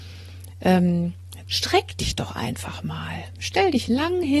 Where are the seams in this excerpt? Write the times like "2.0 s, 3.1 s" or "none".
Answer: 1.4 s

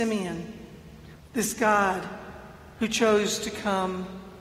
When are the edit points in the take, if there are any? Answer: 1.2 s

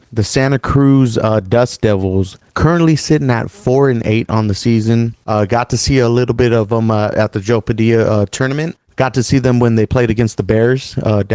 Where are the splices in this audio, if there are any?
none

